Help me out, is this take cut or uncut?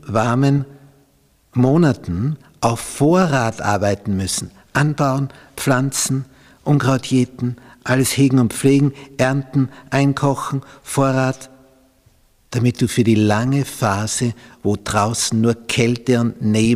uncut